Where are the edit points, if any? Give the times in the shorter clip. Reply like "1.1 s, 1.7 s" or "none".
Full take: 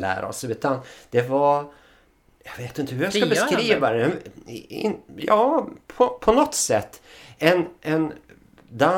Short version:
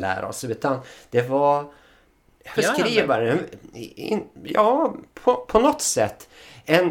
2.6 s